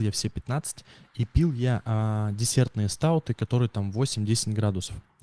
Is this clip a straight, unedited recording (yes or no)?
yes